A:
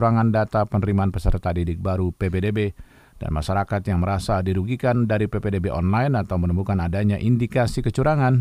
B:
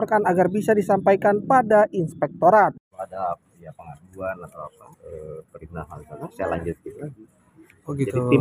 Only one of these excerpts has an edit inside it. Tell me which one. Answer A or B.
B